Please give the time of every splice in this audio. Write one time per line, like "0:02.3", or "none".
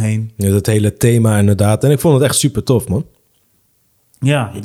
none